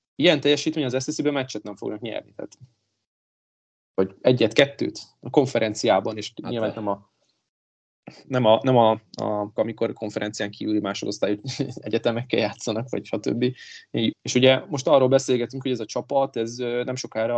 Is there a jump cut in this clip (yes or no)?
yes